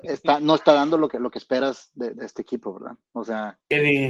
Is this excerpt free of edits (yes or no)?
yes